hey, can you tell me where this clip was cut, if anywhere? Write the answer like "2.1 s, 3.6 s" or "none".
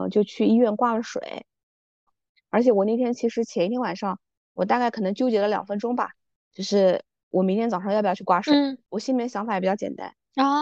2.1 s